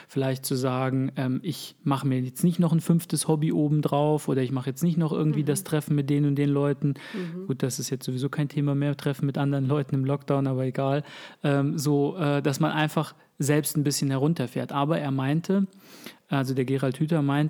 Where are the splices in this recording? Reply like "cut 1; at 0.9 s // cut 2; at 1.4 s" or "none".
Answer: none